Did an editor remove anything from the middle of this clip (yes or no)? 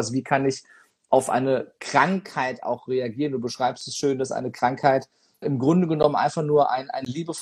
yes